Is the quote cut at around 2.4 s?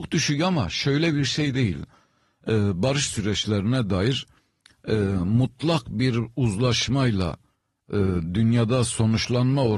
yes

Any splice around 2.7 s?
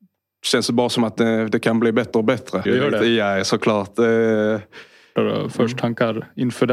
yes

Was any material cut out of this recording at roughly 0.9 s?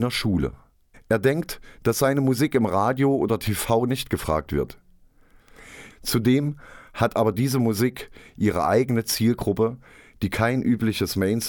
yes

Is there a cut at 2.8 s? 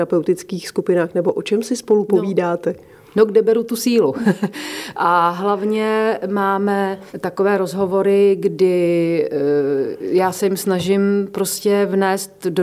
no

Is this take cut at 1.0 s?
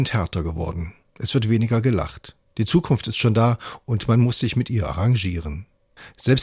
no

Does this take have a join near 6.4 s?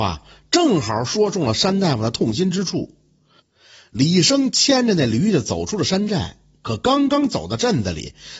no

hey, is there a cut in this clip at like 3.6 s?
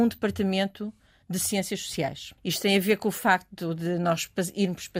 no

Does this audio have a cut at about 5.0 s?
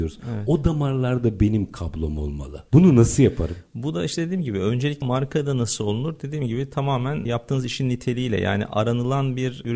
yes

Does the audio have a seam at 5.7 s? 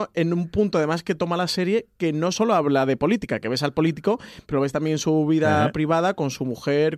no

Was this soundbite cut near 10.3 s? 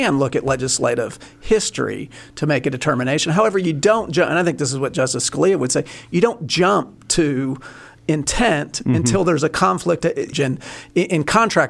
yes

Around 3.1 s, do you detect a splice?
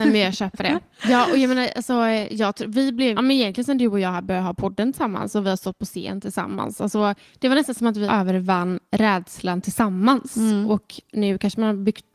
yes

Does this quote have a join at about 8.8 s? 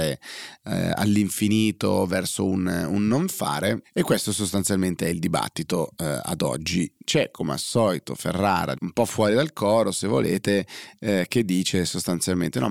yes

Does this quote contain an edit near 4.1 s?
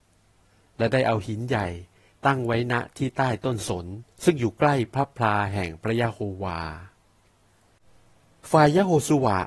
yes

